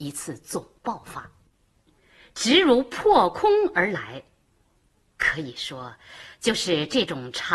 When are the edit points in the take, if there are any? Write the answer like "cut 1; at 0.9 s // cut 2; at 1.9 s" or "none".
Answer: cut 1; at 1.9 s